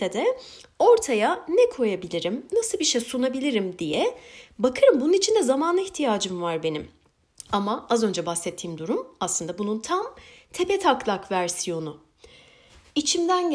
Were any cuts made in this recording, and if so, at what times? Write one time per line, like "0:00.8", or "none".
0:02.5